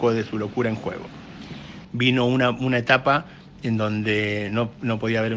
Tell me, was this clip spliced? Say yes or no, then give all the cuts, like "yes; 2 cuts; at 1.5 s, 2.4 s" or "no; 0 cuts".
yes; 1 cut; at 1.8 s